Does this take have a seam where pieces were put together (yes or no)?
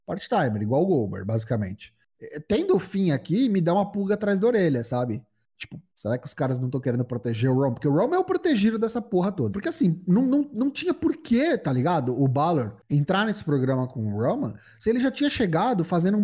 yes